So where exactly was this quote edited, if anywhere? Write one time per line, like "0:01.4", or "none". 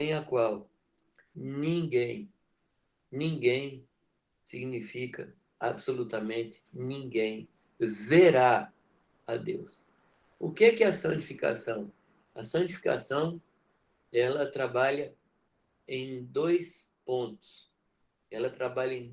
none